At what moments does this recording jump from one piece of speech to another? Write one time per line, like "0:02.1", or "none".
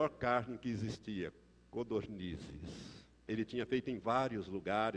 0:03.3